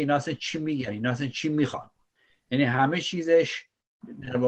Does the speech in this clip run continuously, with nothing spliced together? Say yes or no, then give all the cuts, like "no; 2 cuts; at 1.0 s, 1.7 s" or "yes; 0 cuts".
yes; 0 cuts